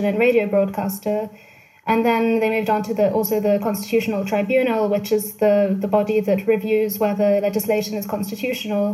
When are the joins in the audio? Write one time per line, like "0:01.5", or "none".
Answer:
none